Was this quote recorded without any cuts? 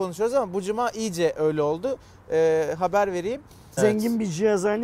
no; 1 cut; at 3.8 s

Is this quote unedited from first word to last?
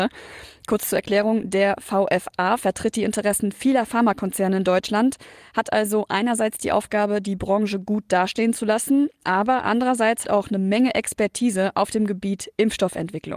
no; 1 cut; at 10.2 s

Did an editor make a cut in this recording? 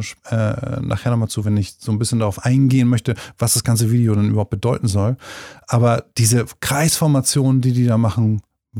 no; 0 cuts

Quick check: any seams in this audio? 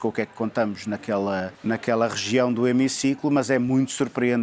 yes; 1 cut; at 1.5 s

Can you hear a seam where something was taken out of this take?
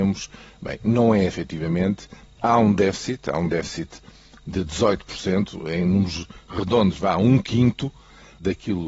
yes; 1 cut; at 1.3 s

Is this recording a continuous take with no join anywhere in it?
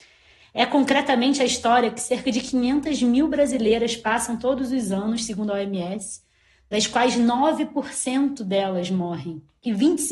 yes; 0 cuts

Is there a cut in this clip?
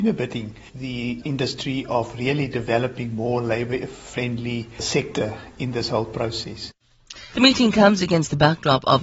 yes; 1 cut; at 7.3 s

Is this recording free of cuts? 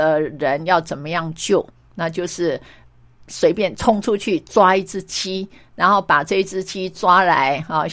yes; 0 cuts

